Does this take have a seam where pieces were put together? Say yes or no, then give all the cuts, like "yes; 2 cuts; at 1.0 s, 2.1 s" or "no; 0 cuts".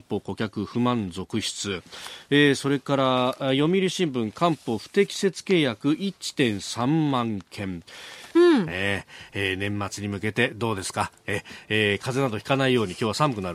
yes; 1 cut; at 8.4 s